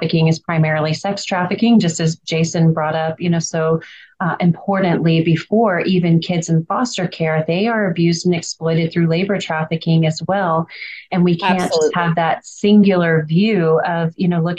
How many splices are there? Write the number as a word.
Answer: zero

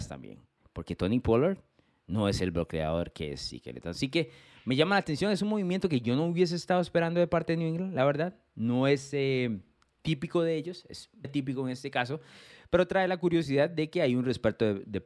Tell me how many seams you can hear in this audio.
one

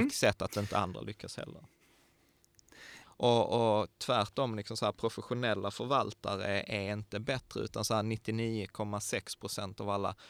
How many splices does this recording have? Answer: one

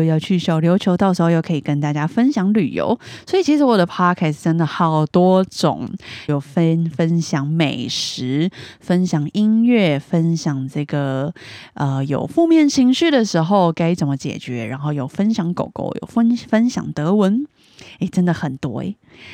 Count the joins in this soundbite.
one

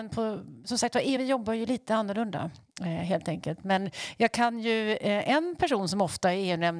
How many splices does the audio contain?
one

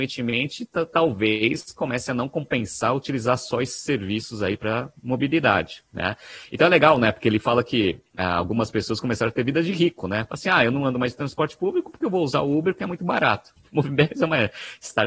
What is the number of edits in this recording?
one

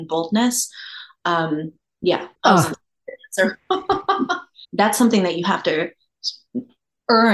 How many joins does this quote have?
two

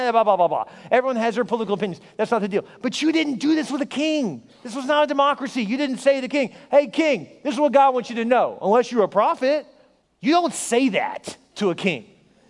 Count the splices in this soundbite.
one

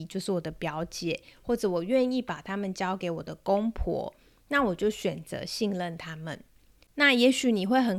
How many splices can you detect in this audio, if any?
zero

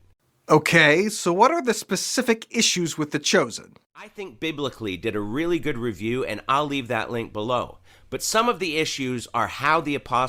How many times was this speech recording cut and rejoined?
zero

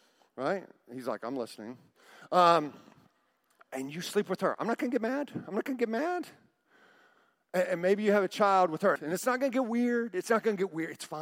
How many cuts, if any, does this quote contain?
one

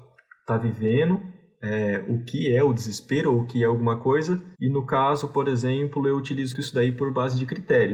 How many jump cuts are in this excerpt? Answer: two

